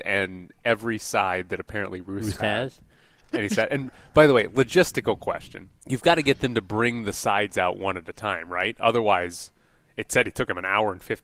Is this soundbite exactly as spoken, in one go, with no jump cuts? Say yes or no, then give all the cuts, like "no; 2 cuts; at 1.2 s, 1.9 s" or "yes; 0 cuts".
no; 2 cuts; at 2.4 s, 5.8 s